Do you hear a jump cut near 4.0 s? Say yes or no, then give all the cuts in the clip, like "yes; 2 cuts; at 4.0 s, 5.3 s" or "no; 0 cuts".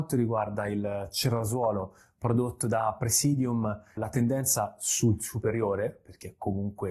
yes; 1 cut; at 4.0 s